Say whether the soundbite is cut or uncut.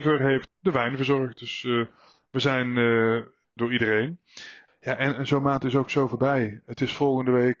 cut